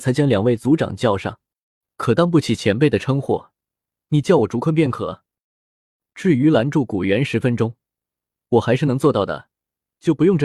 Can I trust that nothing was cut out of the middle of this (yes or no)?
yes